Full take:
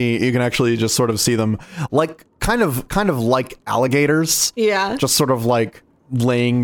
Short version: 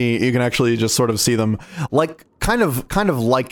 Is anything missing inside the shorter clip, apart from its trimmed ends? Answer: no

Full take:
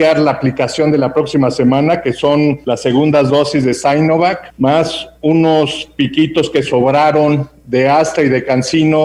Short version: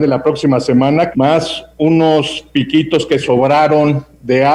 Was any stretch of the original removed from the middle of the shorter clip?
yes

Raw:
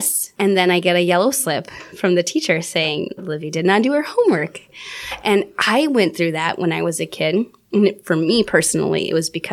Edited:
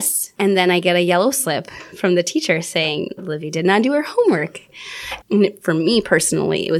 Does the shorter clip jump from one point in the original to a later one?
yes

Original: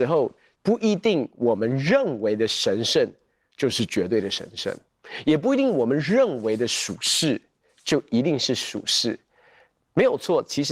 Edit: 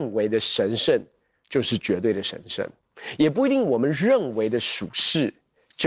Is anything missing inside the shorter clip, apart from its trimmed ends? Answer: no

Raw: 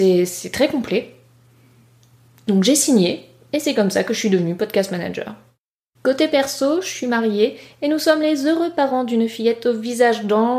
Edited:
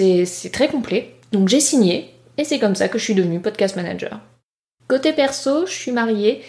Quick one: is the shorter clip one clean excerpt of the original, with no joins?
no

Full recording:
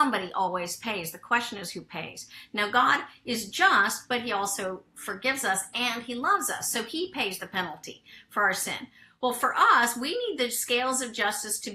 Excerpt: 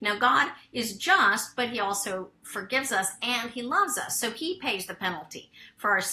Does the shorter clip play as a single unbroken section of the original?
yes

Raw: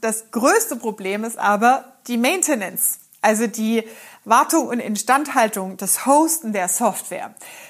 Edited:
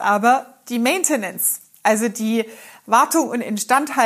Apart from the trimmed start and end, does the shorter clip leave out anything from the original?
no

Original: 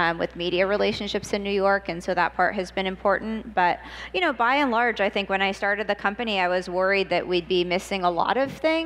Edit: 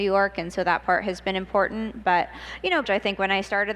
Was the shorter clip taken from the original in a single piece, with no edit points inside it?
no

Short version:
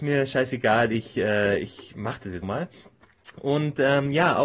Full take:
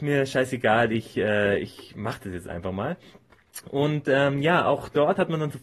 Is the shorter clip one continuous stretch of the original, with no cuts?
no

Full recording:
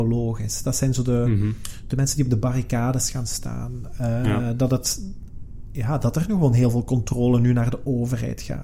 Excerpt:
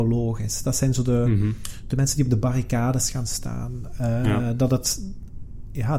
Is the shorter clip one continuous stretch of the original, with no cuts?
yes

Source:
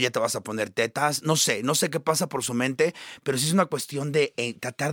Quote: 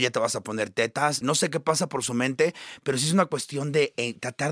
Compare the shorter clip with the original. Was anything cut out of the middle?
yes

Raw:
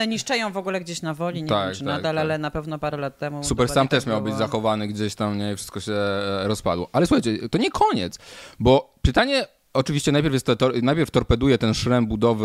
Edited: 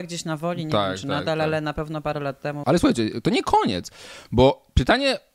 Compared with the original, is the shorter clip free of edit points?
no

